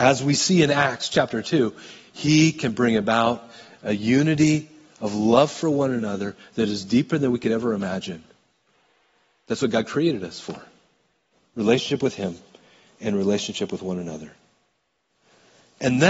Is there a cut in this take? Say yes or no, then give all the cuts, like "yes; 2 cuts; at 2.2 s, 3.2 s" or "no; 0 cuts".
no; 0 cuts